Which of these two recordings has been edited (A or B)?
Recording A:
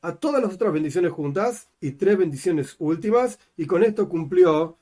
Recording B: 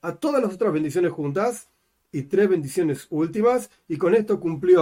A